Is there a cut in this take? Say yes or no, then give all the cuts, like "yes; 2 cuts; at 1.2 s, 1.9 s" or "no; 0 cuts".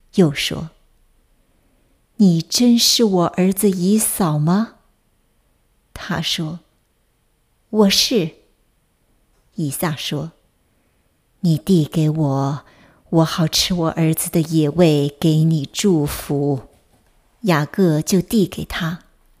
no; 0 cuts